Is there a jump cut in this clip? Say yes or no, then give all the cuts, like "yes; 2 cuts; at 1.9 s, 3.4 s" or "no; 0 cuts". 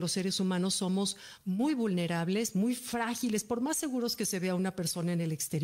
no; 0 cuts